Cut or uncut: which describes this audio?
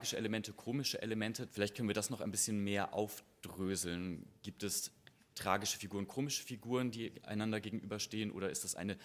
uncut